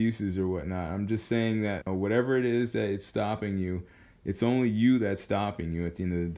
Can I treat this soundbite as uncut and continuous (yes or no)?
no